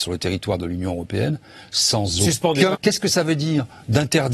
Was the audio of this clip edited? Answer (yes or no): yes